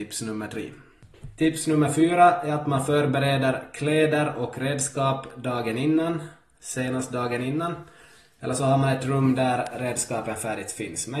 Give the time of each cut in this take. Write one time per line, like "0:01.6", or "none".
none